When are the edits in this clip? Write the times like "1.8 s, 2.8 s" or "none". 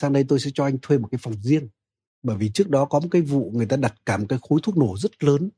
2.1 s